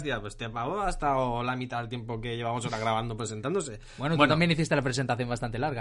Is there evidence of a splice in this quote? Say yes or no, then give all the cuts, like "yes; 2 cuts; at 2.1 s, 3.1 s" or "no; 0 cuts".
no; 0 cuts